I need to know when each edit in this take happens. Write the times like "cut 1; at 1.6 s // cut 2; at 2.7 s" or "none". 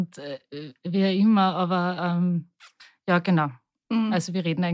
none

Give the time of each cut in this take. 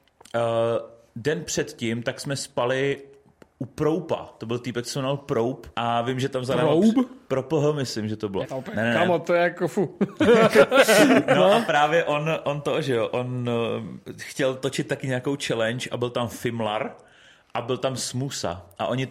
cut 1; at 8.4 s

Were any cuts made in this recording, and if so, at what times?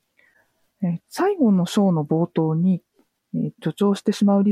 cut 1; at 1.0 s // cut 2; at 3.5 s

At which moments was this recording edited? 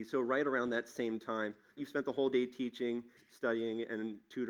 cut 1; at 1.8 s // cut 2; at 3.2 s

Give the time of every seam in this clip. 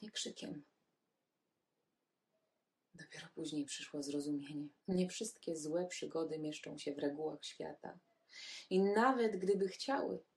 cut 1; at 4.8 s

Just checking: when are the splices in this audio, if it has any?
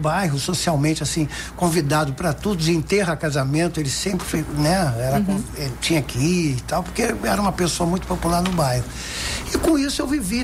none

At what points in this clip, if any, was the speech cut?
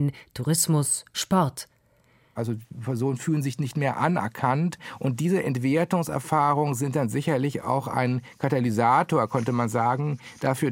cut 1; at 2.3 s

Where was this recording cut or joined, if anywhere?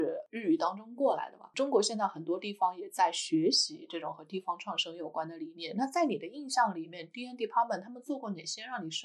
none

